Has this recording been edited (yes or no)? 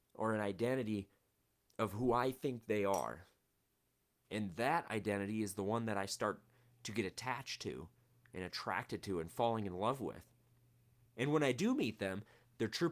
yes